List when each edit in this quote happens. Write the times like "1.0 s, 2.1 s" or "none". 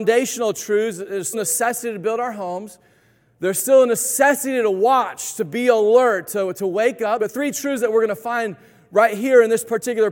1.3 s, 7.2 s